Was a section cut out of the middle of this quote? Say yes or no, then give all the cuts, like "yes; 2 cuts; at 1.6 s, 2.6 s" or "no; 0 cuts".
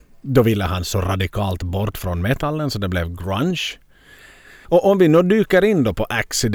yes; 1 cut; at 4.6 s